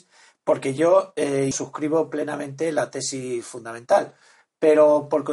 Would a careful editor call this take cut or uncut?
cut